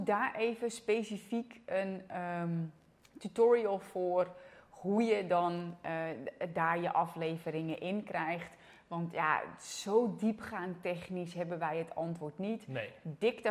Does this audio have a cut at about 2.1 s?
no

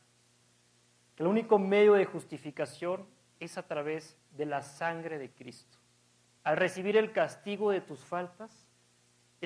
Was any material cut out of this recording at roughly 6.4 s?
yes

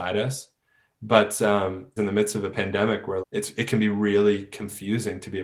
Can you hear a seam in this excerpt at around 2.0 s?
yes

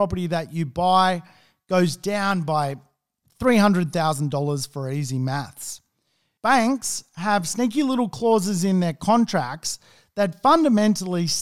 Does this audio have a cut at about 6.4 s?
yes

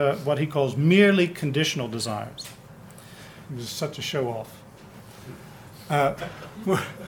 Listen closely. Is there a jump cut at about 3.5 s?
yes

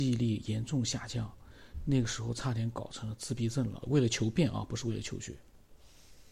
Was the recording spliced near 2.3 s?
no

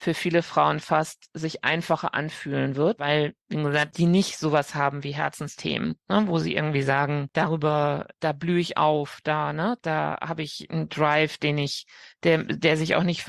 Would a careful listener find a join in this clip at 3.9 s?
yes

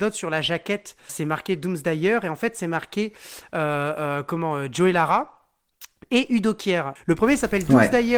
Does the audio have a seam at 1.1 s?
yes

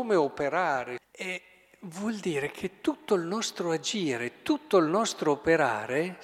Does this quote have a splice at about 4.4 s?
no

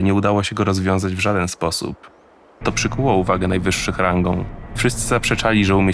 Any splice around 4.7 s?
yes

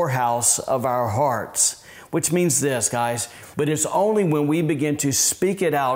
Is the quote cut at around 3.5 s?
yes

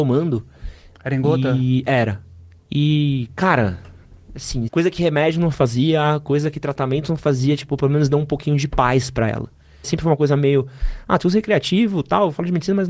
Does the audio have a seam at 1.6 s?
no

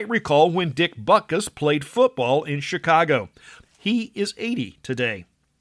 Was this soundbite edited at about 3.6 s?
yes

